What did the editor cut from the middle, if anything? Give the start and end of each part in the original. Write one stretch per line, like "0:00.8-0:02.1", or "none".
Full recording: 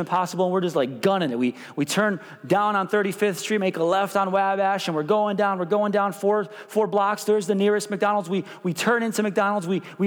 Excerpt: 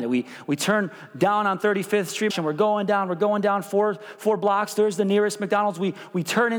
0:03.6-0:04.8